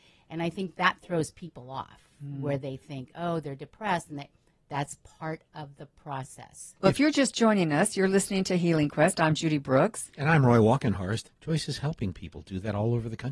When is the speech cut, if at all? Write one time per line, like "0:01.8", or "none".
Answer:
0:06.8
0:11.3